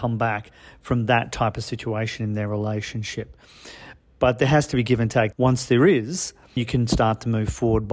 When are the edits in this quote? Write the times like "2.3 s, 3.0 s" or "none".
5.3 s, 6.6 s